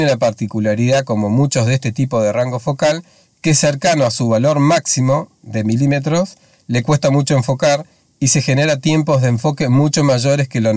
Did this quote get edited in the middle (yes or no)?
no